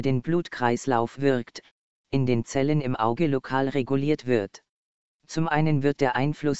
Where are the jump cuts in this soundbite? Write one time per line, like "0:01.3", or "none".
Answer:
0:05.1